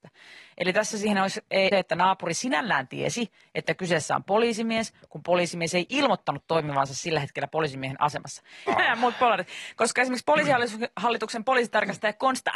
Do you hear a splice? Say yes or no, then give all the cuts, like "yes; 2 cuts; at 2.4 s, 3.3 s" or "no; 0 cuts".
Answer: yes; 2 cuts; at 1.7 s, 8.7 s